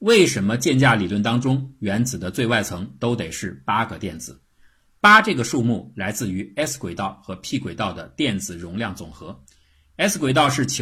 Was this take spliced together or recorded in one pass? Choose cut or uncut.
uncut